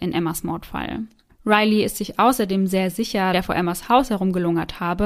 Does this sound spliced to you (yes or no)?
yes